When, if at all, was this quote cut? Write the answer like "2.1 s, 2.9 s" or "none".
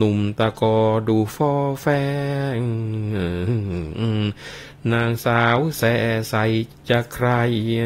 6.7 s